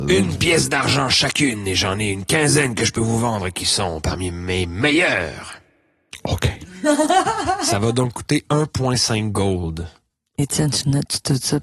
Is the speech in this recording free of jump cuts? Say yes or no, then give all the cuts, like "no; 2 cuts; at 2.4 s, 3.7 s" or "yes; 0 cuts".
yes; 0 cuts